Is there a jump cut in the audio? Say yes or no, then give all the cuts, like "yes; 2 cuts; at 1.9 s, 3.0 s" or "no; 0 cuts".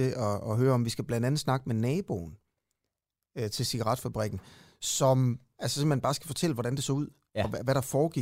no; 0 cuts